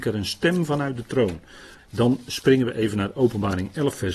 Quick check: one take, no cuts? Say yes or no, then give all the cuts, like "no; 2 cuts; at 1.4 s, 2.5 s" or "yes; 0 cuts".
no; 1 cut; at 1.8 s